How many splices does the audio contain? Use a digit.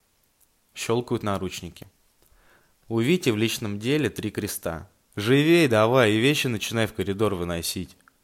1